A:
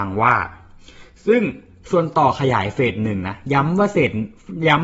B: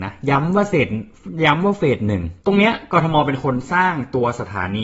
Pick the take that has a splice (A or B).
B